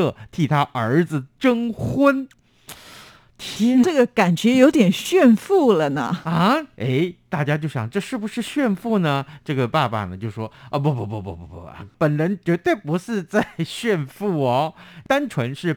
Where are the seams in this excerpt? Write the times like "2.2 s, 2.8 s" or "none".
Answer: 3.8 s